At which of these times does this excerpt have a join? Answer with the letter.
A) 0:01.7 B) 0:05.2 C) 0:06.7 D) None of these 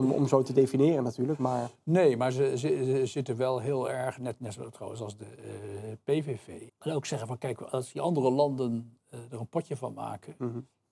C